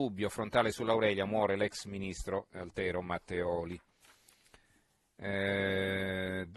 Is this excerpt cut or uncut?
uncut